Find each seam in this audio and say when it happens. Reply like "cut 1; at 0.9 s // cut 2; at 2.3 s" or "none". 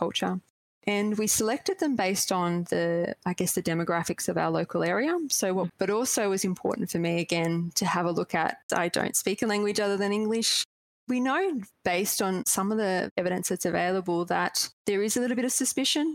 cut 1; at 5.7 s // cut 2; at 8.7 s